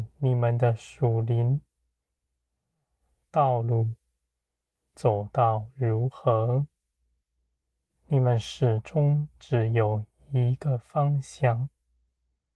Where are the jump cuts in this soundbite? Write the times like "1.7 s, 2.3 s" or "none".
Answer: none